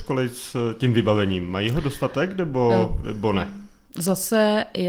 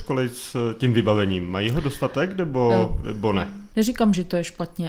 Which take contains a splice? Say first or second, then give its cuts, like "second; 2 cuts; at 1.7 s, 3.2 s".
second; 1 cut; at 3.7 s